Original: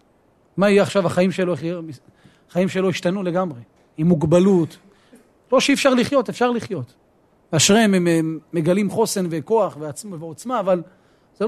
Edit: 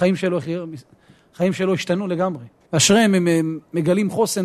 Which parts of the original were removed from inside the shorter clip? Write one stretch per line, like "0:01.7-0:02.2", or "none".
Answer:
0:03.8-0:07.5